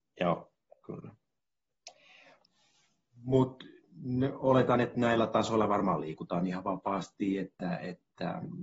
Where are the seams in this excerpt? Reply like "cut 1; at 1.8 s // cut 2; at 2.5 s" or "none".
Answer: none